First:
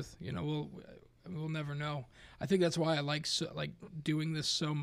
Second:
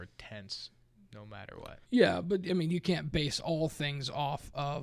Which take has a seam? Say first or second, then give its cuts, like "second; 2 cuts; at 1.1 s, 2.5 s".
second; 1 cut; at 1.8 s